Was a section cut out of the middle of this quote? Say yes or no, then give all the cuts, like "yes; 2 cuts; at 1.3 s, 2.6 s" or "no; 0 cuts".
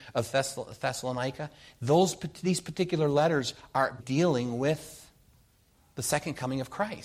yes; 1 cut; at 4.0 s